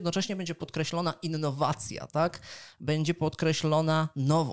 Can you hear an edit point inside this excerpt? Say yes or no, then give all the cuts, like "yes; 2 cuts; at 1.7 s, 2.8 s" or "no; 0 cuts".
no; 0 cuts